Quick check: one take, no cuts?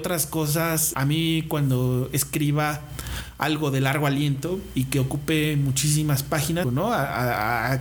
no; 2 cuts; at 0.9 s, 6.6 s

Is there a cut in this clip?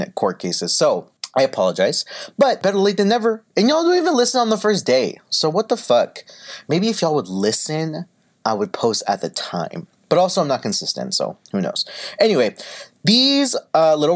no; 0 cuts

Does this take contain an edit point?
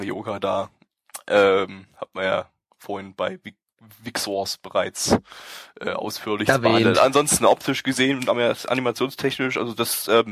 no; 0 cuts

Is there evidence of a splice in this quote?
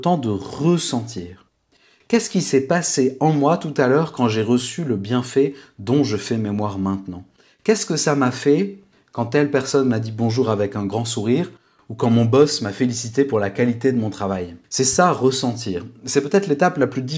yes; 1 cut; at 14.6 s

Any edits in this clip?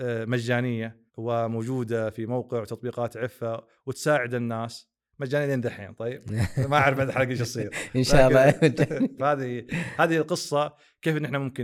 yes; 2 cuts; at 1.1 s, 9.2 s

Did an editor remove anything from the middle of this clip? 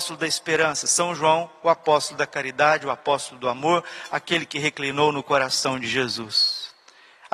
no; 0 cuts

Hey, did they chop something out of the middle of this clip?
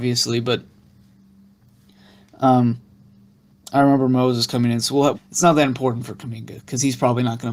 yes; 1 cut; at 5.1 s

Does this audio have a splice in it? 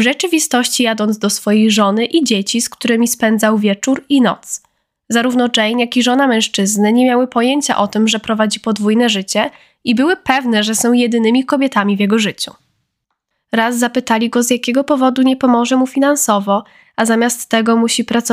yes; 1 cut; at 13.3 s

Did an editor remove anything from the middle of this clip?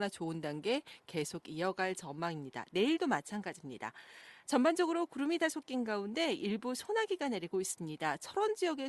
yes; 1 cut; at 4.4 s

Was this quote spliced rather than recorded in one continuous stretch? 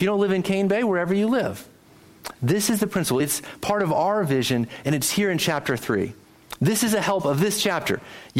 no; 0 cuts

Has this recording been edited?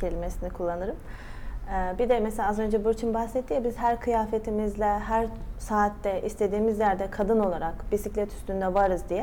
no; 0 cuts

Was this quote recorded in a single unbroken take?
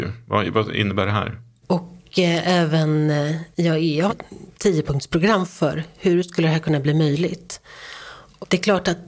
no; 2 cuts; at 1.6 s, 4.1 s

